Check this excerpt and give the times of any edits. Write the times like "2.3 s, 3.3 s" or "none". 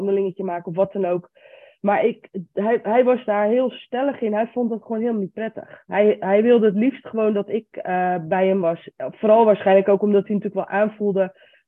none

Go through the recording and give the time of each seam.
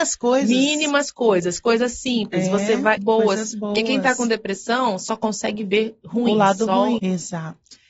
3.0 s, 7.0 s

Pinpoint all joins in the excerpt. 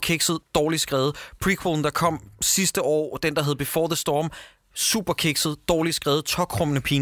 none

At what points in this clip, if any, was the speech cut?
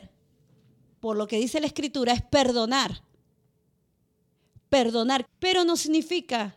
5.3 s

